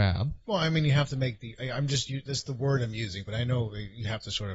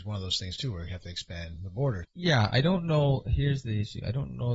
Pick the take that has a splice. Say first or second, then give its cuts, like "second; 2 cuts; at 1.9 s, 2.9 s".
second; 1 cut; at 2.0 s